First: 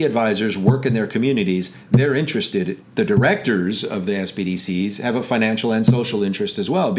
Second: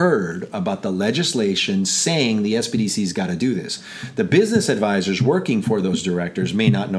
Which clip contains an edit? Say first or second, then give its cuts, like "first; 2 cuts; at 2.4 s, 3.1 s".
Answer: first; 1 cut; at 2.8 s